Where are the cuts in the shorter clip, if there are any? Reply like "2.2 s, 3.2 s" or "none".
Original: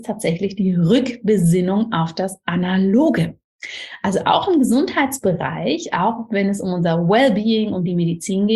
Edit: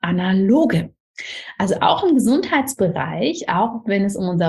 none

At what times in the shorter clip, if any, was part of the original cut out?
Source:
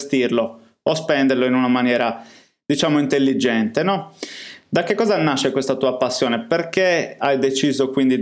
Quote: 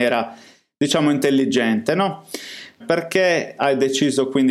2.8 s

